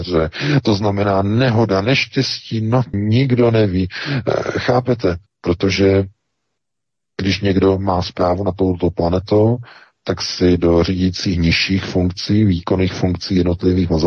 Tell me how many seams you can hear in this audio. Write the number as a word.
two